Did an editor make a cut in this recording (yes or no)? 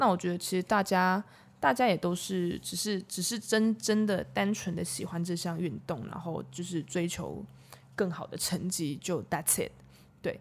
no